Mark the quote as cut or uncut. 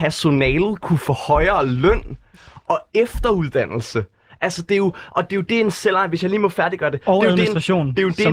uncut